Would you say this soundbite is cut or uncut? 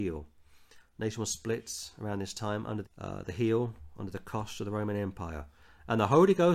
cut